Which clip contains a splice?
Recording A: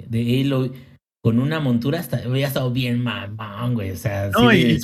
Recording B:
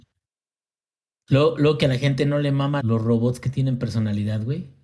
B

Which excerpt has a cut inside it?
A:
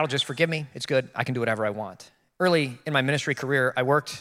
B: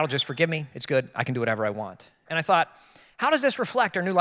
B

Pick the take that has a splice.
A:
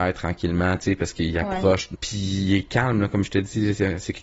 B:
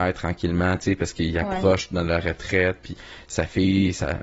A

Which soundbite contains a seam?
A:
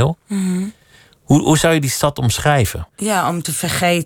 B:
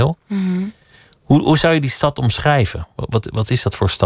A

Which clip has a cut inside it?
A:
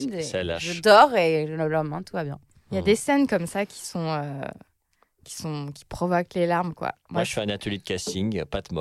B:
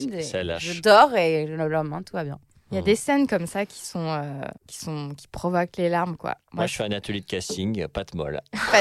B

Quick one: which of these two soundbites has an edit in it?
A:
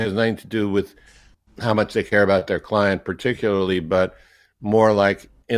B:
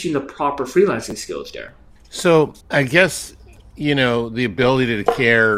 B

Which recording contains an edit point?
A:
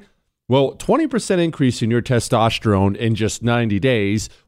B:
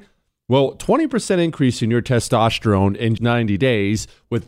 B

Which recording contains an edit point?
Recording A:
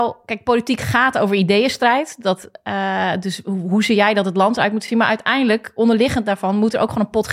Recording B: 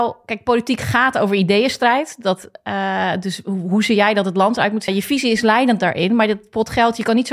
B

